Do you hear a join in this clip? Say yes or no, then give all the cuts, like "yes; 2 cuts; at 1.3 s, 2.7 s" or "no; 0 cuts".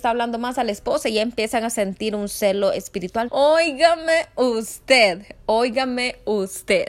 yes; 1 cut; at 3.3 s